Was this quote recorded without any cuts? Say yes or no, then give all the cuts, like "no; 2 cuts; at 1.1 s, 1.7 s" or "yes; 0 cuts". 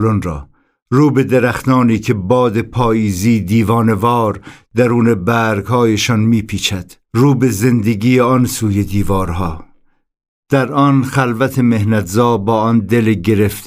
no; 1 cut; at 7.0 s